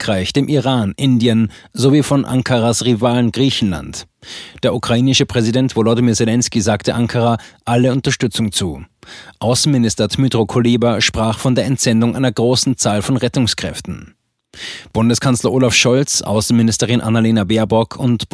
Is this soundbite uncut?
yes; 0 cuts

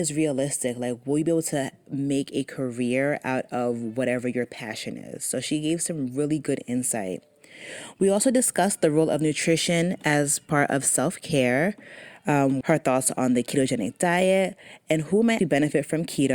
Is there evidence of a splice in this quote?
yes; 2 cuts; at 12.6 s, 15.4 s

